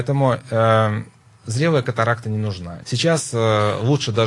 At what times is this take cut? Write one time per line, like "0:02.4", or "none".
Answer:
0:02.8

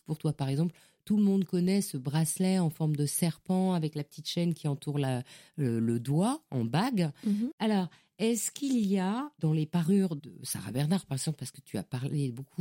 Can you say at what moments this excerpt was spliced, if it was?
0:07.5

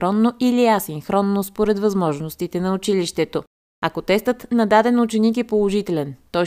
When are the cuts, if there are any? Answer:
none

